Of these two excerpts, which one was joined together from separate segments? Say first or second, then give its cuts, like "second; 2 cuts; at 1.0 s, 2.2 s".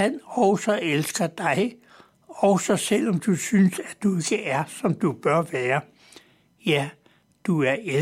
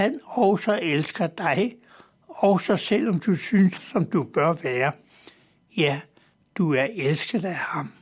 second; 1 cut; at 3.8 s